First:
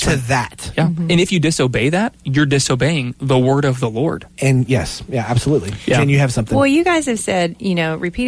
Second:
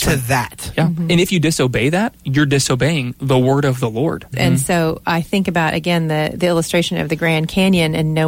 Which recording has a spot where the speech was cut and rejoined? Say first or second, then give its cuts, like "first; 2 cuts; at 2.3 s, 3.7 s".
second; 1 cut; at 4.3 s